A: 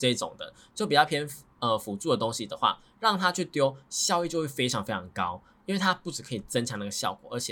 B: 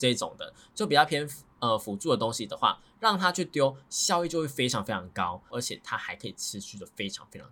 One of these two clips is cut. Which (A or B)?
B